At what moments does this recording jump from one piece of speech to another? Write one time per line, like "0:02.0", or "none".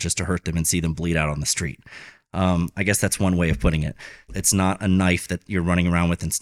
0:04.3